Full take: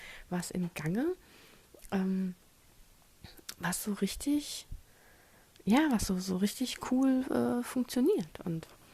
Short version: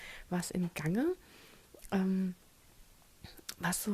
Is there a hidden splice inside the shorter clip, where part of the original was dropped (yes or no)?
no